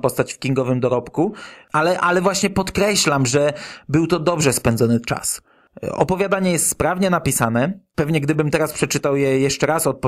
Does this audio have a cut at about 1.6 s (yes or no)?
yes